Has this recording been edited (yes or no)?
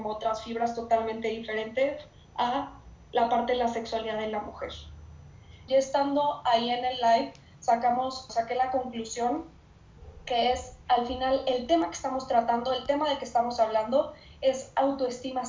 yes